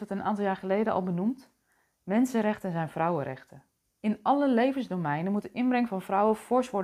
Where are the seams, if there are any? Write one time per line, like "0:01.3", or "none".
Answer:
0:04.0